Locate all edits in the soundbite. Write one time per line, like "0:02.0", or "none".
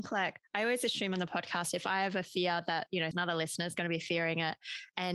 0:03.1